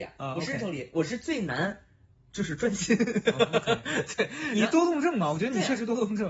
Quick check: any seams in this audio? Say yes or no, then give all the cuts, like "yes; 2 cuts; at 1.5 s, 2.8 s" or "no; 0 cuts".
no; 0 cuts